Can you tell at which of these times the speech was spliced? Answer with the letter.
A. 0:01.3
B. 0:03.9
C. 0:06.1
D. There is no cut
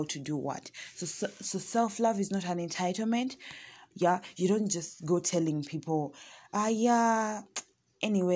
B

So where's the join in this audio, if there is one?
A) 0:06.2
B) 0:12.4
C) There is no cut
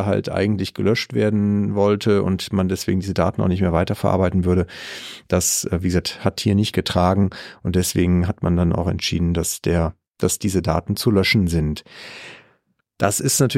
C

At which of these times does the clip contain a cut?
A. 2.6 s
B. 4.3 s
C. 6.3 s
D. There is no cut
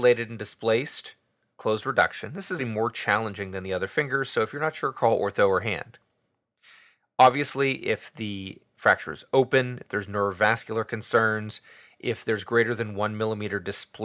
A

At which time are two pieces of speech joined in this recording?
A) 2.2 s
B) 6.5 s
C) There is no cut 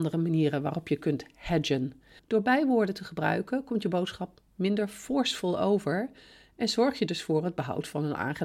A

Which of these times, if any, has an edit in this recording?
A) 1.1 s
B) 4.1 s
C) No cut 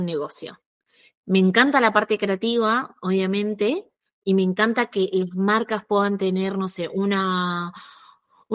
C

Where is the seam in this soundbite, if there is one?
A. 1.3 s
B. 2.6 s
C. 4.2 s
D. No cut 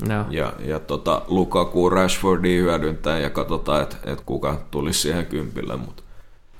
C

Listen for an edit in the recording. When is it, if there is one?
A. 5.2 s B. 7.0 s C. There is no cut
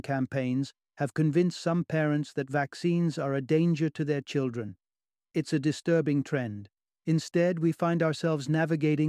B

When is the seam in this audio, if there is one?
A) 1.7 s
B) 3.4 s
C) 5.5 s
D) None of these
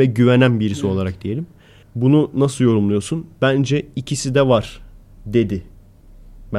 D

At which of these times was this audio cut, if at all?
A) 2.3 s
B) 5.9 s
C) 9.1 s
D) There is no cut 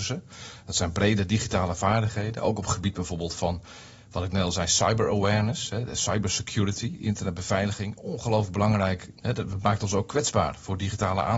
C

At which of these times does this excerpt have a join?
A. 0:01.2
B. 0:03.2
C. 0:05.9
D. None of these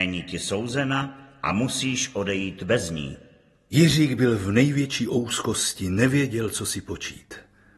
D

